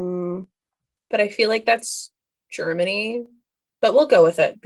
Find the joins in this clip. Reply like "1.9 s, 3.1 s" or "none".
1.0 s